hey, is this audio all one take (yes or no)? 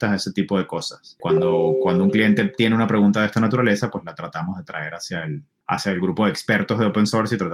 yes